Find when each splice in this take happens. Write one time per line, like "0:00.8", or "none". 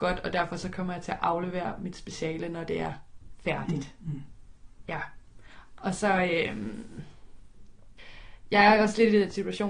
none